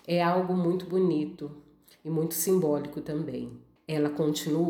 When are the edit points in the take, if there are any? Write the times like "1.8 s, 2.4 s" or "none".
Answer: 3.8 s